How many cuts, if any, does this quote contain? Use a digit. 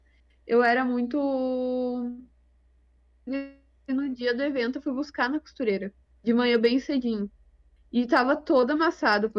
1